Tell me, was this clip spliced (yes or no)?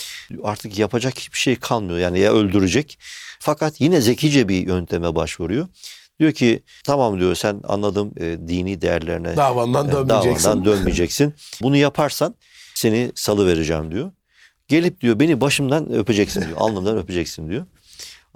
yes